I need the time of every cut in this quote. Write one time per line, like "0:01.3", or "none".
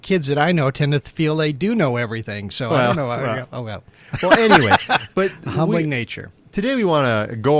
none